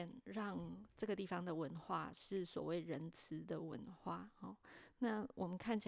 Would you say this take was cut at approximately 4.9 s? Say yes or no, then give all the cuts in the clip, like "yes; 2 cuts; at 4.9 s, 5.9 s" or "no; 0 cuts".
no; 0 cuts